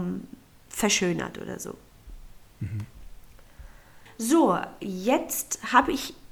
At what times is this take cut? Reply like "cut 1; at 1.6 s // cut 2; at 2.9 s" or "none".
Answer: cut 1; at 4.1 s